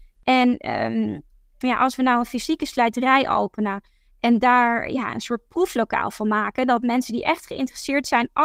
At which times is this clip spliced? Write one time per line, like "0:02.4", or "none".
0:01.6